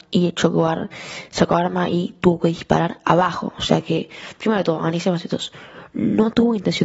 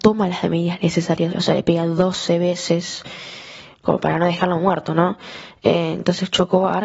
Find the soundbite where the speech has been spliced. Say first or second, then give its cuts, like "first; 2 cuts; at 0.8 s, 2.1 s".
second; 1 cut; at 1.3 s